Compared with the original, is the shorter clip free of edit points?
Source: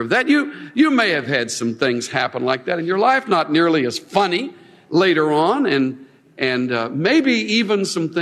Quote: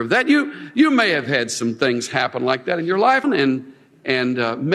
no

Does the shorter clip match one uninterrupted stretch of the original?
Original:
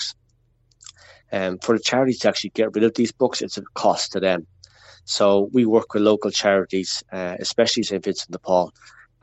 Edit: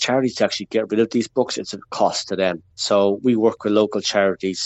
no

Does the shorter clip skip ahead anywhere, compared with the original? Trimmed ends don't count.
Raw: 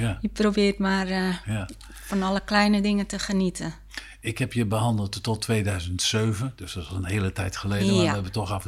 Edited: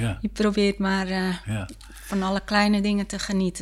no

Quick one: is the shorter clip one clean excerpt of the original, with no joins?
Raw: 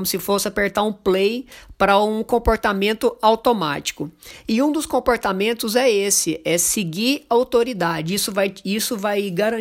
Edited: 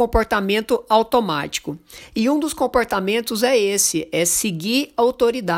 yes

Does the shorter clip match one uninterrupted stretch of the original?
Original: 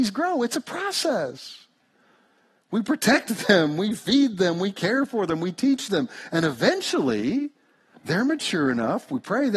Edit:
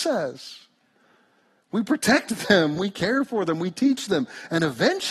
no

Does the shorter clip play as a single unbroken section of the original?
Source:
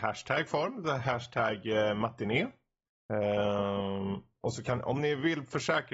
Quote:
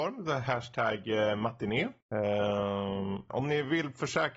no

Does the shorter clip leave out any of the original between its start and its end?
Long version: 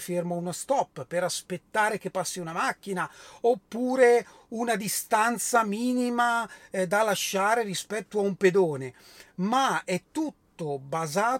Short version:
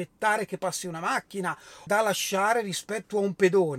yes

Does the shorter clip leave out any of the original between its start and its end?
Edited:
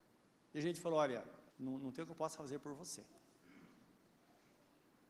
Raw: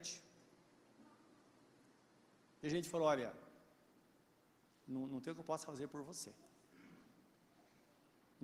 yes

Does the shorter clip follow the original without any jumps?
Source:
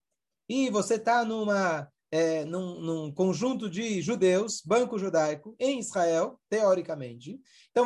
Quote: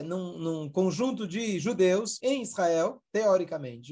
no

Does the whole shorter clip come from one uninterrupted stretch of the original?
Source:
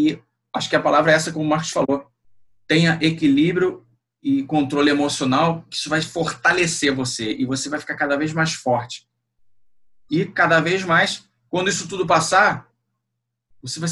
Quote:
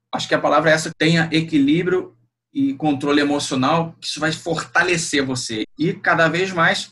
no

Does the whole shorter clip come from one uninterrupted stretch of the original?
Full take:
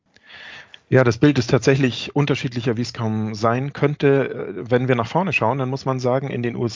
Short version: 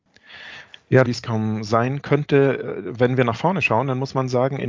no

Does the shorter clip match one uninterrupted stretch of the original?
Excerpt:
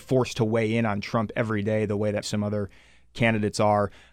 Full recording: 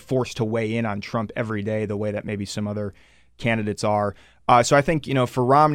no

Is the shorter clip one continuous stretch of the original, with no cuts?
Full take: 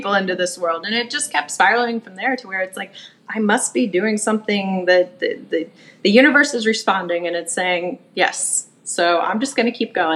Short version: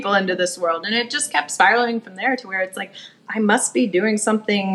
yes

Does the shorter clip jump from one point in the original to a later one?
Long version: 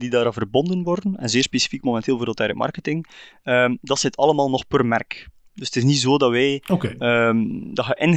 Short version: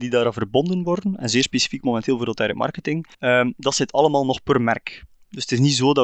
yes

